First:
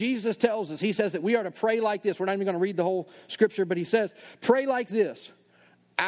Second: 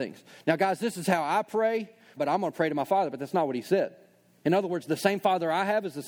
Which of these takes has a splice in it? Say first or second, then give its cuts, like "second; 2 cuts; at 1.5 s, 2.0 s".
second; 2 cuts; at 2.2 s, 4.4 s